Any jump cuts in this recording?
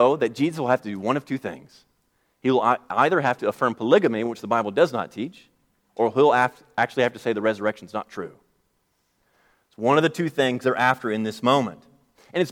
no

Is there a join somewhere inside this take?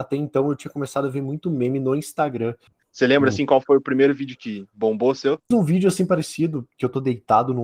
yes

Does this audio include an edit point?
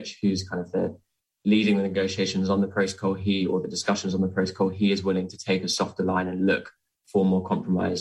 no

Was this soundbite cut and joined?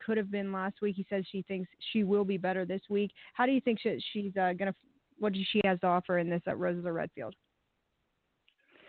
no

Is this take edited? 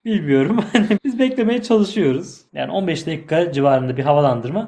yes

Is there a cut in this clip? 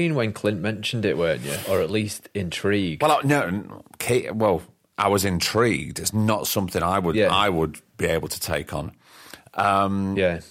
no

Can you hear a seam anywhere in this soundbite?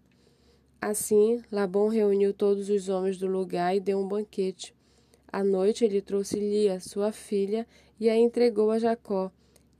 no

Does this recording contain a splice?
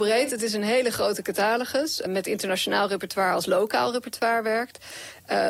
yes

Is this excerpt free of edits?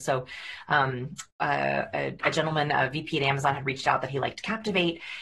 yes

